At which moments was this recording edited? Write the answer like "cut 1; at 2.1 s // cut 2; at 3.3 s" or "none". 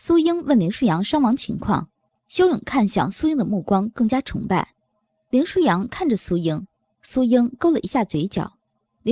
cut 1; at 2.2 s // cut 2; at 4.9 s